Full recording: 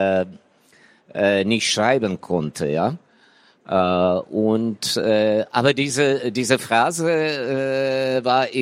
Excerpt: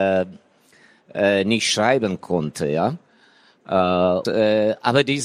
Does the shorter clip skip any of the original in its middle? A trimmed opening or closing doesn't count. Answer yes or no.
yes